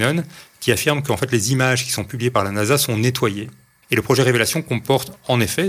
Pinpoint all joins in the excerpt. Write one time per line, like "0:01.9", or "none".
0:03.8